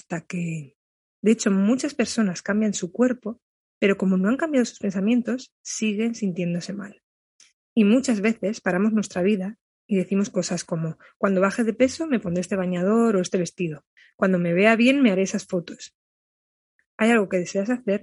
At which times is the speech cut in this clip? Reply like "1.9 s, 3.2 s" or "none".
1.2 s